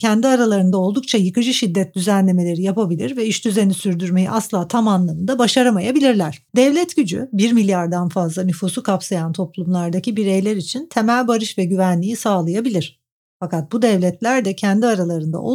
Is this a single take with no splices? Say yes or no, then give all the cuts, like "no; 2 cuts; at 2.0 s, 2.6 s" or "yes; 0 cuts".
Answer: no; 1 cut; at 6.5 s